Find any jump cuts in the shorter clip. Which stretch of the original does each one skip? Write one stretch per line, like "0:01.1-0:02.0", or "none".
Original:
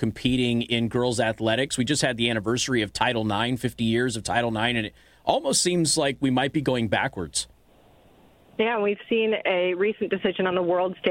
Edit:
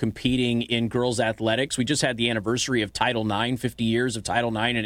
none